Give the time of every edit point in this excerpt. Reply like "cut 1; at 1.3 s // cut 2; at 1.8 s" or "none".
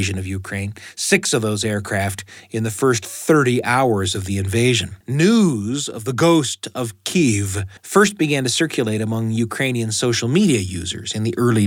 cut 1; at 5.0 s // cut 2; at 7.8 s